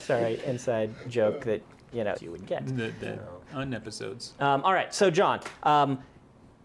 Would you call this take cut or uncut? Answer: cut